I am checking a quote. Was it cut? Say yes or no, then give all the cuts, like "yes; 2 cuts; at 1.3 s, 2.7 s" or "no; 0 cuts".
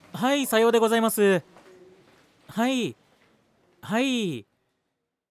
no; 0 cuts